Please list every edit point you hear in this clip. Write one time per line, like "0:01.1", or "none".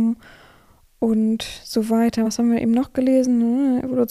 none